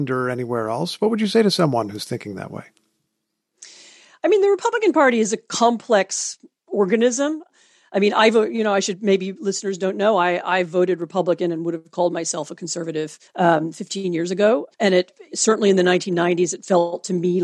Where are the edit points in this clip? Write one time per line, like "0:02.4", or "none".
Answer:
0:13.3
0:14.7